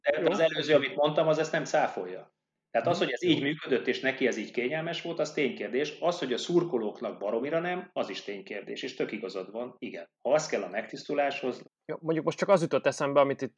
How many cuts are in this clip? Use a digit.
2